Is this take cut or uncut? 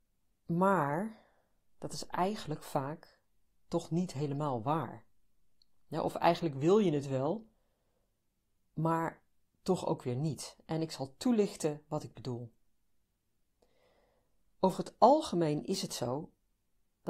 uncut